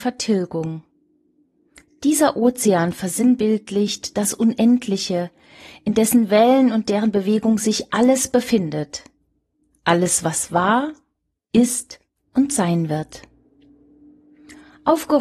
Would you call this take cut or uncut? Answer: uncut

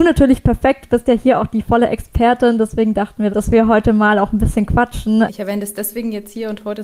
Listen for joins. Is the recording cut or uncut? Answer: cut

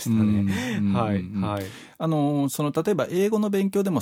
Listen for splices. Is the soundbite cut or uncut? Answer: uncut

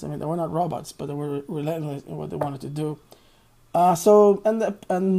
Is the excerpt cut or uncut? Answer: uncut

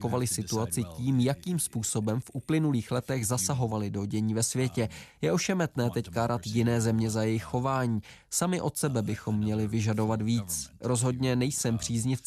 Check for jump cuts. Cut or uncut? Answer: uncut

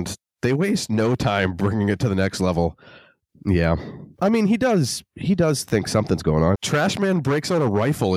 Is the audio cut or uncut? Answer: cut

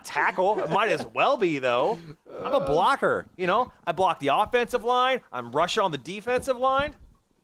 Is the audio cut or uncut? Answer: uncut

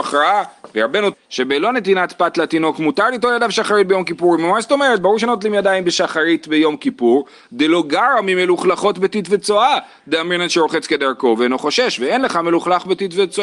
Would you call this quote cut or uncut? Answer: cut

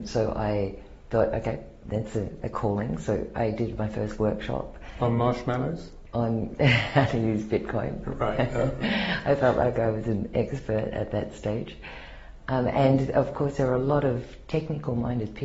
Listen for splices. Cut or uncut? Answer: uncut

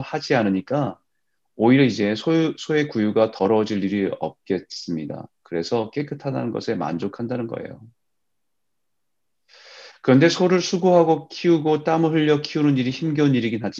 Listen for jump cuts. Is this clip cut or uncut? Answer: uncut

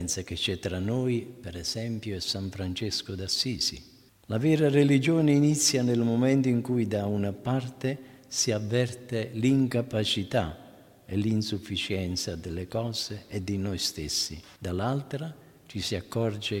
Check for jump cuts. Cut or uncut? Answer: cut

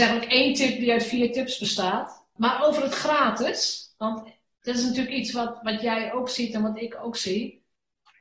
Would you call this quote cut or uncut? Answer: uncut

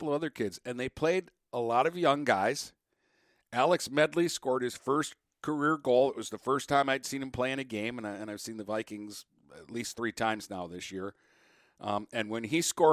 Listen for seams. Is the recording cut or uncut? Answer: uncut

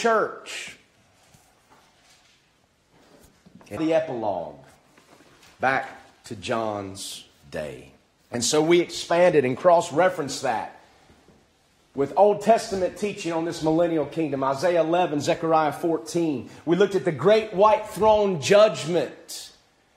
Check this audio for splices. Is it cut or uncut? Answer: cut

